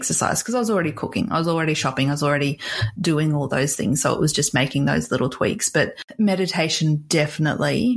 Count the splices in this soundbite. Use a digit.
0